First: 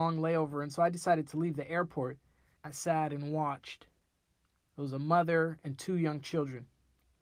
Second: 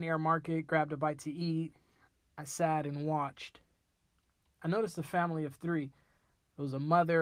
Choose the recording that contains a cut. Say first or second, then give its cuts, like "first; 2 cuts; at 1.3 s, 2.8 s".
first; 2 cuts; at 2.6 s, 4.7 s